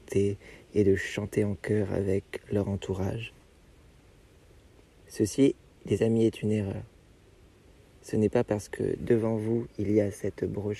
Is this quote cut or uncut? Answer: uncut